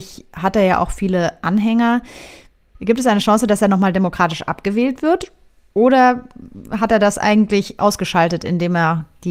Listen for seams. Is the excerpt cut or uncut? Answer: uncut